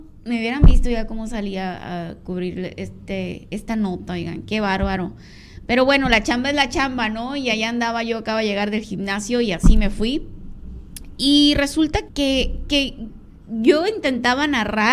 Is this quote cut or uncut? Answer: cut